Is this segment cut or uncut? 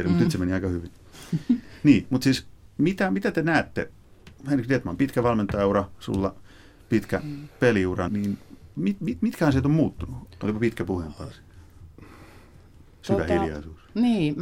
cut